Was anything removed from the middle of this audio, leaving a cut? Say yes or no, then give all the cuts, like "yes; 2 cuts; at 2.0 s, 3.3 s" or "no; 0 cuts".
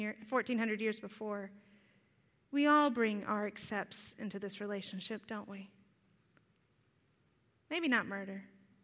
yes; 1 cut; at 2.4 s